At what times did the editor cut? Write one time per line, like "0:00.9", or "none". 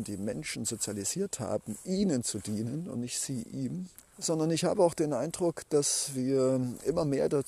0:04.0